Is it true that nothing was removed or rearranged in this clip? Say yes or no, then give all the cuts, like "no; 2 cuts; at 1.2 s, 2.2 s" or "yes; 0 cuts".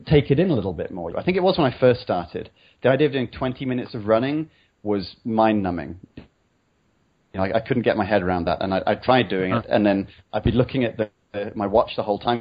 no; 1 cut; at 1.1 s